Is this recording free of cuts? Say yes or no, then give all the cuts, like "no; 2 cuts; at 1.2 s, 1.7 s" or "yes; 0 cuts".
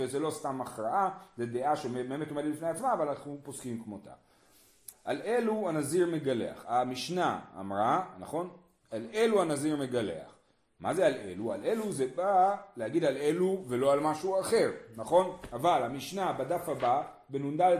no; 1 cut; at 4.9 s